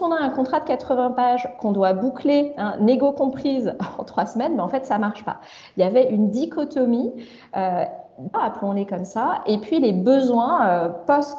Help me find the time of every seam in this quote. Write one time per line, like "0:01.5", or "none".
0:08.3